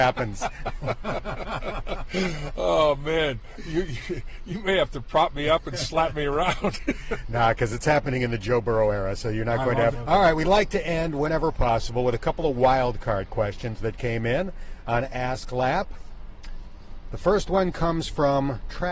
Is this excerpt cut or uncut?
cut